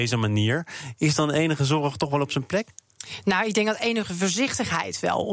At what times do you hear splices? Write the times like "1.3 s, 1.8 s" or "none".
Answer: none